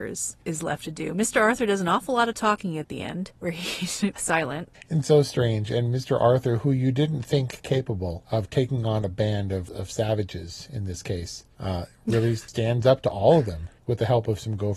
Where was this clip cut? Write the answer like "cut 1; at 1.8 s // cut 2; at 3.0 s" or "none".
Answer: cut 1; at 4.2 s